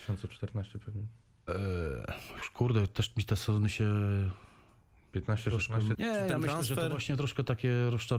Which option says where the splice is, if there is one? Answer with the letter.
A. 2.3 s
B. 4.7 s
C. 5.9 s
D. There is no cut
C